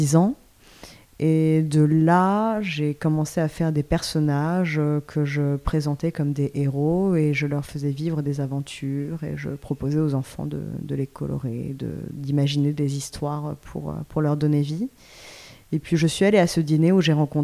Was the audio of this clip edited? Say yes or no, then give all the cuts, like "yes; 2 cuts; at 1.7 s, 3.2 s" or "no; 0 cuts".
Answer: no; 0 cuts